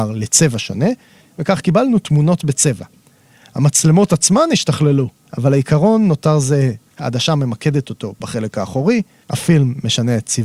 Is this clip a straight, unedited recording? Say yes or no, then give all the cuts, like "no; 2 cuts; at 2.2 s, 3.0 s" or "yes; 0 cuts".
no; 2 cuts; at 5.3 s, 6.9 s